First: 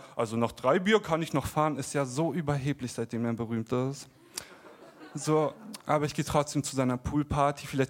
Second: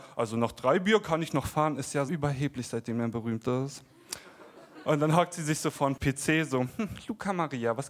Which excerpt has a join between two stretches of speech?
second; 2 cuts; at 2.1 s, 4.8 s

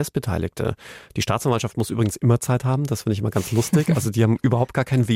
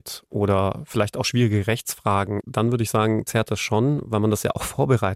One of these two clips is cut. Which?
second; 1 cut; at 2.4 s

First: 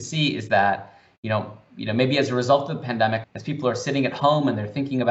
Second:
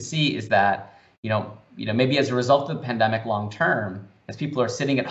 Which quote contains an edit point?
first; 1 cut; at 3.2 s

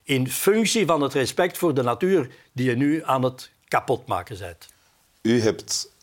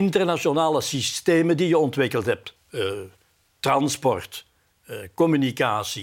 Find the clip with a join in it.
second; 1 cut; at 2.6 s

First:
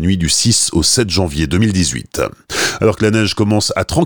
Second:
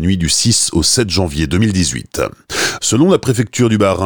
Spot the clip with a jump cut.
second; 1 cut; at 2.8 s

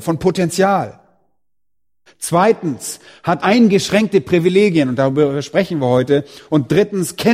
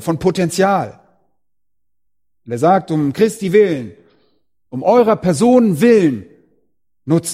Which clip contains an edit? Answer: first; 2 cuts; at 2.1 s, 3.4 s

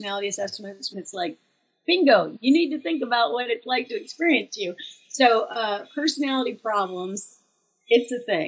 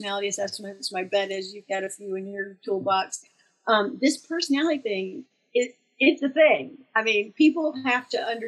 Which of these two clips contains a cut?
first; 1 cut; at 0.9 s

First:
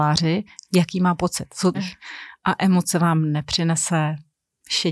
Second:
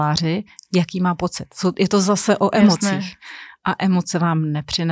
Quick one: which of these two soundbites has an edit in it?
first; 1 cut; at 1.7 s

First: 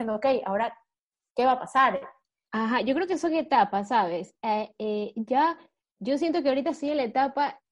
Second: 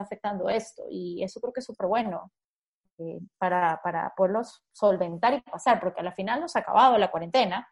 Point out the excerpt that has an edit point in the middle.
first; 1 cut; at 2.5 s

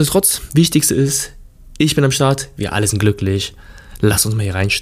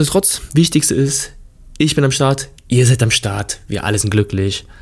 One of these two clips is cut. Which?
first; 1 cut; at 2.5 s

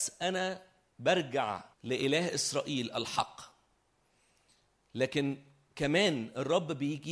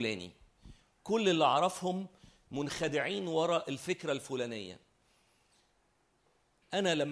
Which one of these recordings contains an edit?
first; 1 cut; at 1.7 s

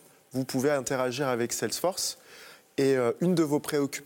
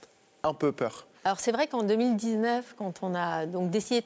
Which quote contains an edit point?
second; 1 cut; at 1.1 s

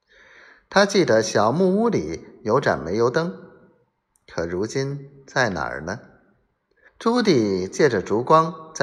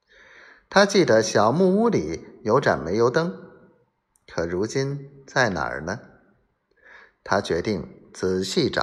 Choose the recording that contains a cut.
first; 1 cut; at 6.9 s

